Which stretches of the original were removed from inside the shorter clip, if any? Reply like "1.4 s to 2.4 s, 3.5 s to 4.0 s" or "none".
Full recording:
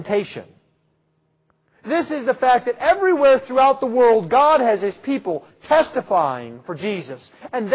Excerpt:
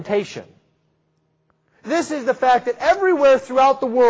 none